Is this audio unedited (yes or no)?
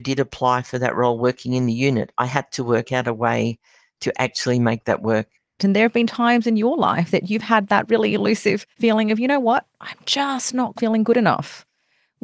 no